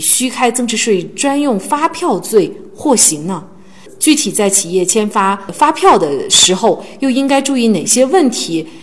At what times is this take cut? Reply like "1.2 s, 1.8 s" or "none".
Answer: none